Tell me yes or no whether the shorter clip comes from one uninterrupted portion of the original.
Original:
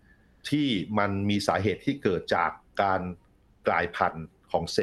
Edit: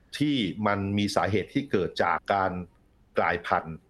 no